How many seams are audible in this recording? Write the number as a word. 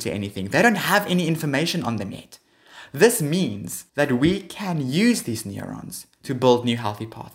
one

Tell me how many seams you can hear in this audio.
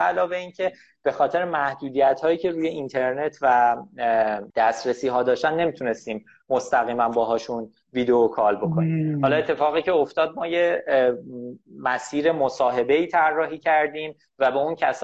one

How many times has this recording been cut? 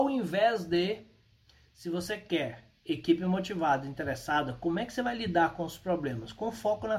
zero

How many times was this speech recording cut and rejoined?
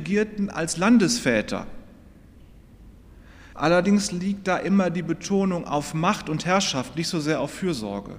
one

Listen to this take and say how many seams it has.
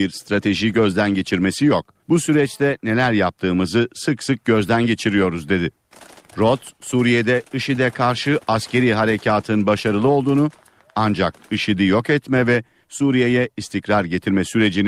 one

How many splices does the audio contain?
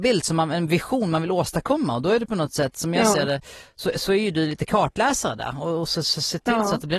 zero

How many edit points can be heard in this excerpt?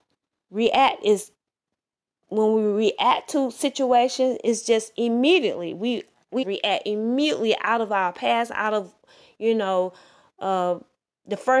one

